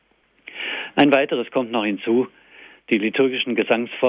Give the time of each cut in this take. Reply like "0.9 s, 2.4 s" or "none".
none